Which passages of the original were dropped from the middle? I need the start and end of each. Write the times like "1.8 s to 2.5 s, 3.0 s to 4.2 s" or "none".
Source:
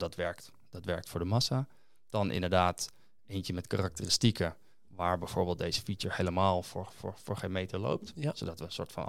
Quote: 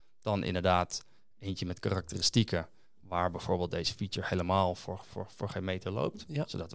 none